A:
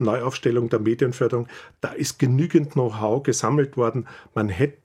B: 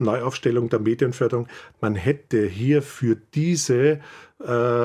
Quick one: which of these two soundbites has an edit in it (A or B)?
B